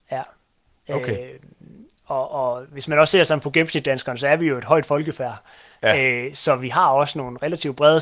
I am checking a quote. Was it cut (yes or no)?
no